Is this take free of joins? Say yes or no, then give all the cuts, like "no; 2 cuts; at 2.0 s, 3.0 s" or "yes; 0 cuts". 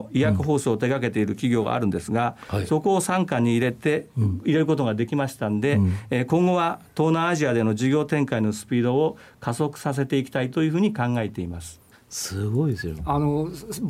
no; 2 cuts; at 11.9 s, 13.0 s